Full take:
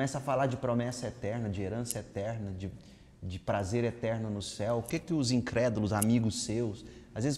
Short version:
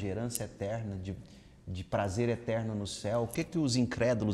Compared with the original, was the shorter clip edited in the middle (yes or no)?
no